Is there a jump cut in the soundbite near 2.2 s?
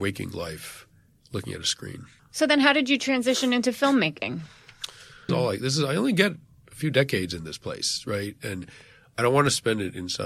yes; 2 cuts; at 2.2 s, 5.3 s

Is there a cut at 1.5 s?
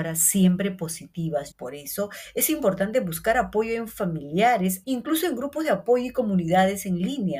yes; 2 cuts; at 1.5 s, 4.8 s

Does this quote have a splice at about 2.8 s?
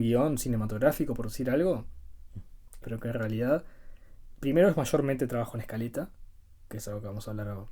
yes; 1 cut; at 2.8 s

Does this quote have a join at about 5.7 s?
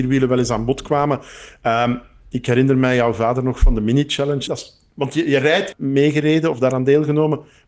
yes; 2 cuts; at 4.5 s, 5.7 s

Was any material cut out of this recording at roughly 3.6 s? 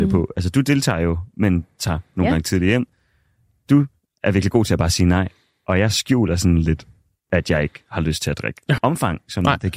no; 1 cut; at 8.8 s

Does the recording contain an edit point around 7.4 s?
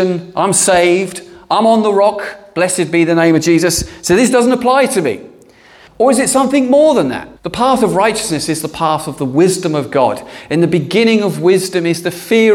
yes; 2 cuts; at 5.9 s, 7.4 s

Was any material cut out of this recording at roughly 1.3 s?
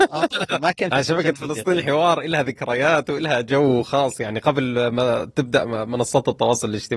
no; 0 cuts

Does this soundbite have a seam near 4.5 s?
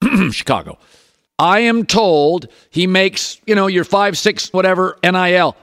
yes; 2 cuts; at 1.3 s, 4.5 s

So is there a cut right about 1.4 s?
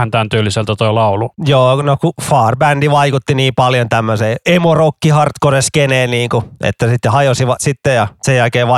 no; 1 cut; at 7.6 s

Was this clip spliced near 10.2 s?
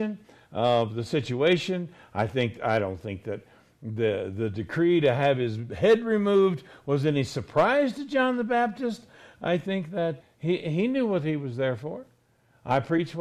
yes; 1 cut; at 10.2 s

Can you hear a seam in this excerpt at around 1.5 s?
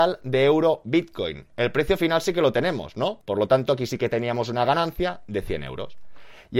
no; 1 cut; at 3.2 s

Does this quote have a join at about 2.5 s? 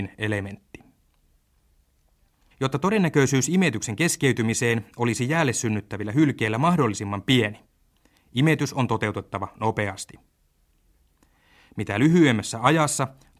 yes; 1 cut; at 2.5 s

